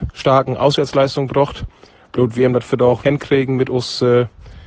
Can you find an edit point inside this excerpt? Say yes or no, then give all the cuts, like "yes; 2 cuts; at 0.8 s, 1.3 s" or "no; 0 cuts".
yes; 1 cut; at 3.0 s